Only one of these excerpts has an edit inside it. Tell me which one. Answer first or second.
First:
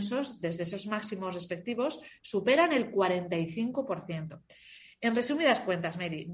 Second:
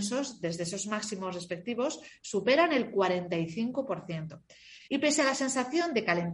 second